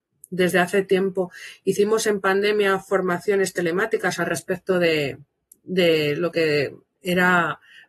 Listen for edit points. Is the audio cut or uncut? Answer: uncut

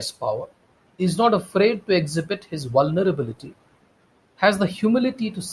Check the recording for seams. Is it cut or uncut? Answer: uncut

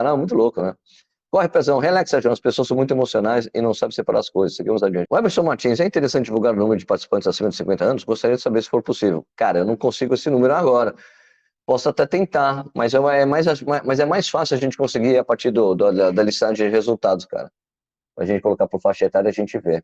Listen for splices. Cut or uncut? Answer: cut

